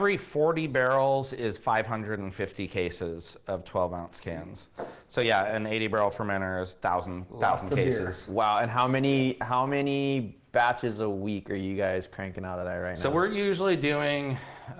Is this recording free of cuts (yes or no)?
yes